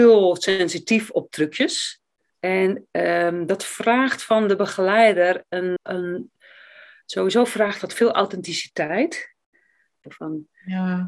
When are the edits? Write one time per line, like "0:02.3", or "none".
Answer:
0:02.3
0:05.8
0:10.0